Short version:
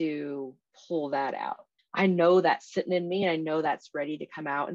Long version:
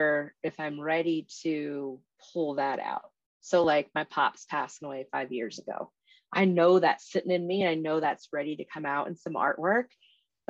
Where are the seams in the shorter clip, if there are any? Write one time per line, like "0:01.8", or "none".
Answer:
0:01.8